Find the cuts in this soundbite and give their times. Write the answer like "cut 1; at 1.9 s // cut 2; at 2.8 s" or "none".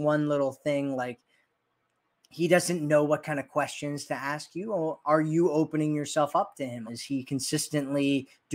cut 1; at 6.9 s